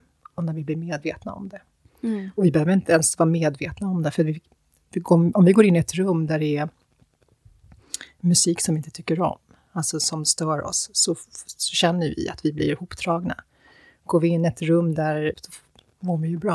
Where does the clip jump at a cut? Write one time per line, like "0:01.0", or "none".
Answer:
0:15.3